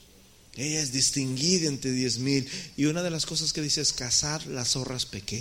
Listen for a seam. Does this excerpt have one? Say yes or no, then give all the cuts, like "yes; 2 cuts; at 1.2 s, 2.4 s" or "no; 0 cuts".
no; 0 cuts